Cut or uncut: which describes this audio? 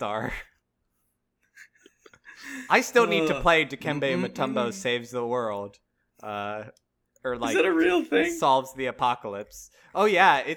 uncut